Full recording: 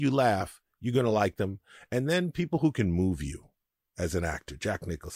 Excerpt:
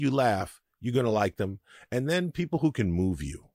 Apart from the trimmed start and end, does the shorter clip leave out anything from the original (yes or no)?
no